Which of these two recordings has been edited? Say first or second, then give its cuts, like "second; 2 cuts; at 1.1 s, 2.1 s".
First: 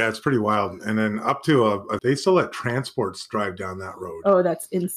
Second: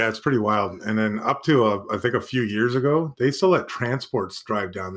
first; 1 cut; at 2.0 s